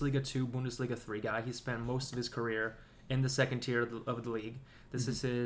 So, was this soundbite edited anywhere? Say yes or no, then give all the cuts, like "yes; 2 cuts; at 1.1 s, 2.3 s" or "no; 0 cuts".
no; 0 cuts